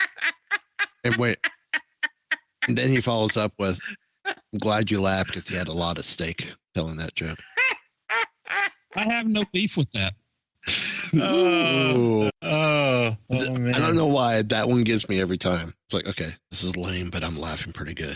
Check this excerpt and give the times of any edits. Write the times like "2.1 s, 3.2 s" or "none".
12.3 s